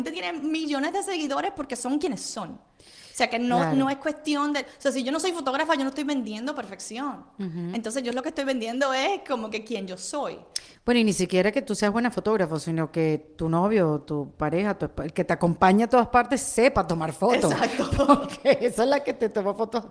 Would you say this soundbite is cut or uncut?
uncut